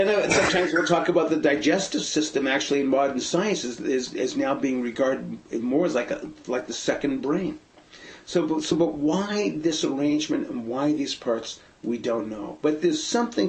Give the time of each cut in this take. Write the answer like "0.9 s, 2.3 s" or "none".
none